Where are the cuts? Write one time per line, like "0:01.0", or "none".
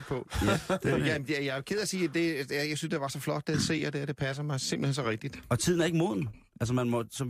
none